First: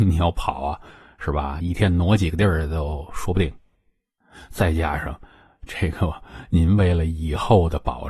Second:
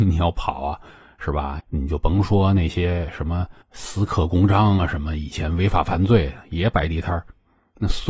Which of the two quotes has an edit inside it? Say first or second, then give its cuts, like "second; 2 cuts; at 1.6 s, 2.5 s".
second; 2 cuts; at 1.6 s, 3.6 s